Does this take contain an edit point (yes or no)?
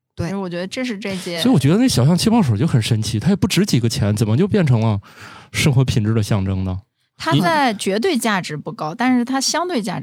no